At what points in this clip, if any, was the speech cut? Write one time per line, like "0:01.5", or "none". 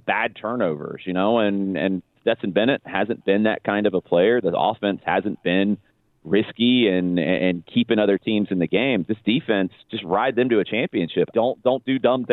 0:09.8
0:11.3